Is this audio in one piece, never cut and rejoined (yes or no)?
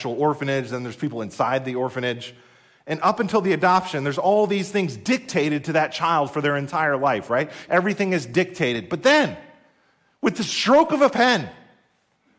no